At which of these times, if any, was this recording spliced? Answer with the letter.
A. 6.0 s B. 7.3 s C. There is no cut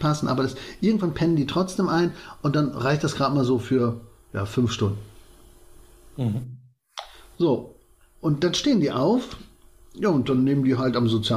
C